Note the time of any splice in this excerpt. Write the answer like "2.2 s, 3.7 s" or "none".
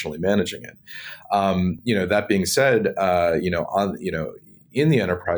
none